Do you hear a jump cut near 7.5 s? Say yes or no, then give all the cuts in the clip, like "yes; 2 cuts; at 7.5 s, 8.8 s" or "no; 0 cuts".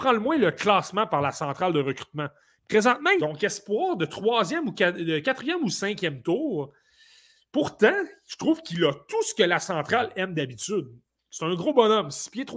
no; 1 cut; at 3.2 s